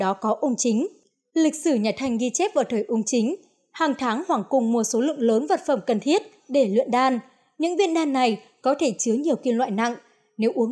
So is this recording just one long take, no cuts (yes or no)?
yes